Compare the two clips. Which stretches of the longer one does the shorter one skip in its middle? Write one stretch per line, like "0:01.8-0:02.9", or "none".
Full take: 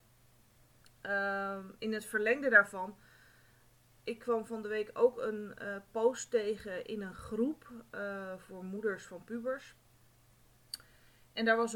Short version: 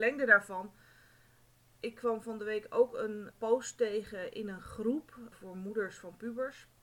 0:05.6-0:05.8
0:07.8-0:08.4